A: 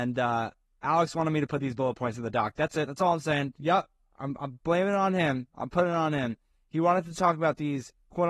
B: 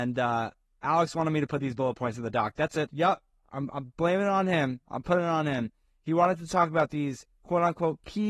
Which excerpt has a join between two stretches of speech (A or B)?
B